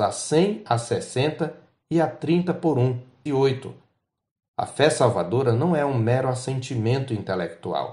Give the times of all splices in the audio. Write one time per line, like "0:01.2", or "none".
0:03.3